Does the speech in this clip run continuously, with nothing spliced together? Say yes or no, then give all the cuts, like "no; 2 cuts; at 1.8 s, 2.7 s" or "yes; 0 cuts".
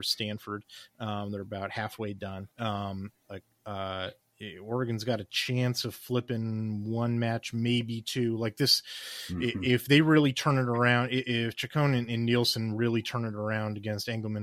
no; 1 cut; at 2.5 s